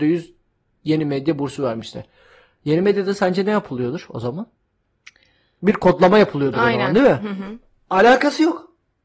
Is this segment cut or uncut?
uncut